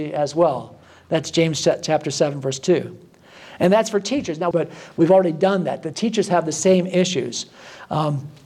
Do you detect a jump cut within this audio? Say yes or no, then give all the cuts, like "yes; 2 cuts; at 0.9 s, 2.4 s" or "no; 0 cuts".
yes; 1 cut; at 4.5 s